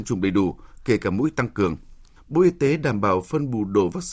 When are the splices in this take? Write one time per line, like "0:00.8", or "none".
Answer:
0:02.2